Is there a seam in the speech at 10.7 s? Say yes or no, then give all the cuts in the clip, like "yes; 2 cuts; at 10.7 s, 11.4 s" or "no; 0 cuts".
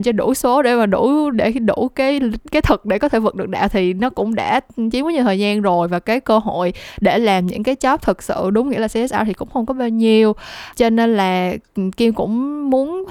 yes; 2 cuts; at 1.3 s, 10.7 s